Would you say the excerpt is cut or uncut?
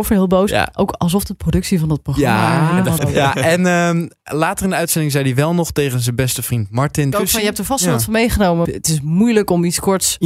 cut